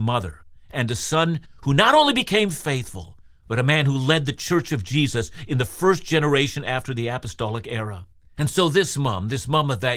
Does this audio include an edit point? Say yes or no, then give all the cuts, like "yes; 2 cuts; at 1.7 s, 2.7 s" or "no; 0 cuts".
no; 0 cuts